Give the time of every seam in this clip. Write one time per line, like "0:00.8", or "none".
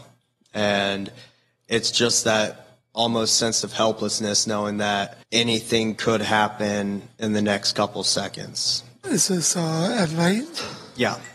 0:05.2
0:09.0